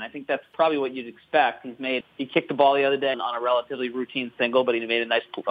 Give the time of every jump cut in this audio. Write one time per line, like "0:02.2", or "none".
0:02.0
0:03.1